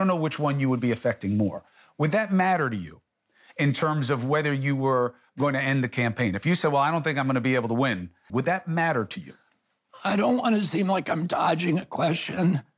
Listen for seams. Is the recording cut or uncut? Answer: cut